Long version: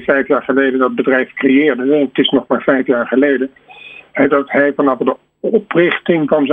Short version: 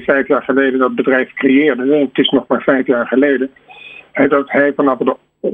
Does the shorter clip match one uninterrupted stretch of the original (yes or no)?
yes